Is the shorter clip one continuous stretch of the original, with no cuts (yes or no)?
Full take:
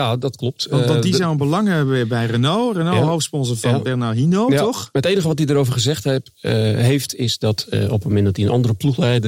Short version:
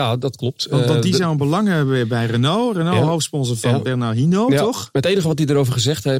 yes